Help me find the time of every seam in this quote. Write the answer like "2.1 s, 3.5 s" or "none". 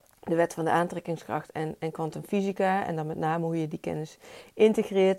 none